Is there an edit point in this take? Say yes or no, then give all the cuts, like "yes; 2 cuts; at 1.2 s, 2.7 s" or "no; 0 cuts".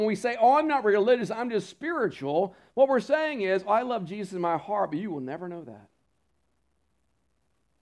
no; 0 cuts